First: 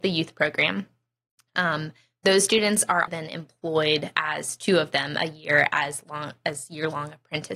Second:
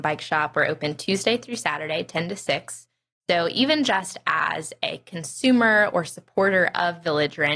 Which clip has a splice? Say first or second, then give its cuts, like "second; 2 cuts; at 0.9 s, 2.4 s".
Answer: first; 1 cut; at 3.1 s